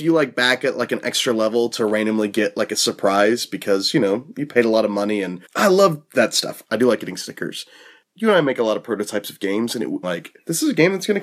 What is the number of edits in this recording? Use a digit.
3